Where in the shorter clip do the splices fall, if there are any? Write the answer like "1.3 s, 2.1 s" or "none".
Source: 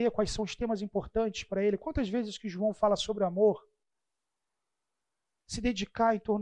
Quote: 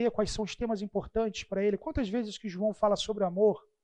none